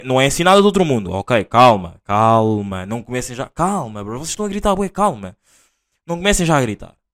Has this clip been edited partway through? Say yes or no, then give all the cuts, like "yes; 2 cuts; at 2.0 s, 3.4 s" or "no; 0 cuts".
no; 0 cuts